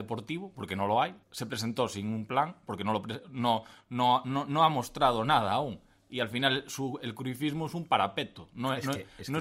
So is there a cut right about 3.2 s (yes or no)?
no